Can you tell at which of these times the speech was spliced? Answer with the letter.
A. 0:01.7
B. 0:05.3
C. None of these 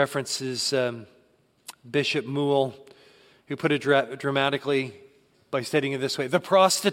B